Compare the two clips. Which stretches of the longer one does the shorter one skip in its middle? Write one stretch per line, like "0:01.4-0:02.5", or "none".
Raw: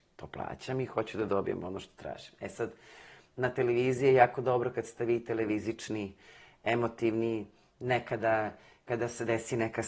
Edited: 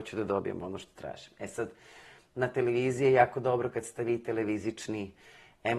none